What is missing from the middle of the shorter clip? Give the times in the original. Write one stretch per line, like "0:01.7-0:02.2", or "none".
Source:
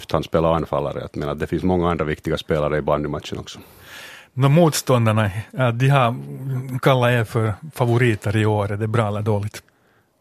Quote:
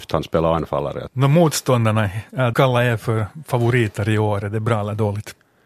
0:01.1-0:04.3
0:05.7-0:06.8